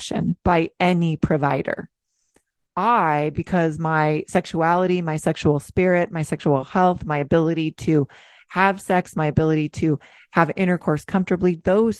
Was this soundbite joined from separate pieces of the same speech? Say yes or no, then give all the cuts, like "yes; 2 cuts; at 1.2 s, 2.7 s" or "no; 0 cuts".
no; 0 cuts